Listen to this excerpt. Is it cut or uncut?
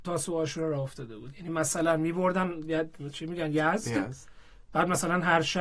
uncut